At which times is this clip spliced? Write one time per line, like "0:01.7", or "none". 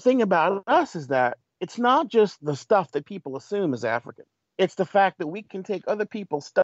0:04.4